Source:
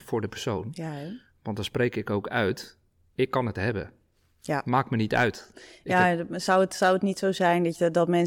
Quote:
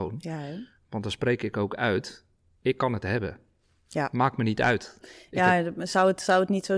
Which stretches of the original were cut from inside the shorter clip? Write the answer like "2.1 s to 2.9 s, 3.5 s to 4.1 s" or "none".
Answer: none